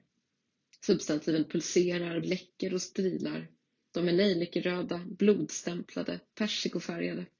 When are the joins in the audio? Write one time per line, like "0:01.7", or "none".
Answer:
0:02.2